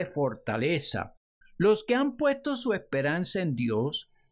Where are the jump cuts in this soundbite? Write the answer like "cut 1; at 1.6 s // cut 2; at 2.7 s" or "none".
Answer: cut 1; at 1.4 s